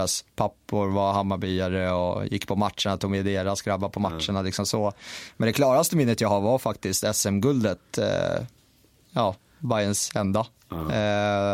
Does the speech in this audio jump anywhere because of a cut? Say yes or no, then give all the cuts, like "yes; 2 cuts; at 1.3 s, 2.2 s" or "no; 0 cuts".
no; 0 cuts